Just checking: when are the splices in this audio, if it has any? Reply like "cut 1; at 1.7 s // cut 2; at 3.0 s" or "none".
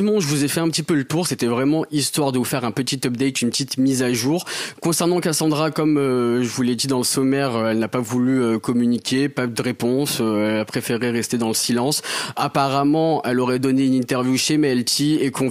none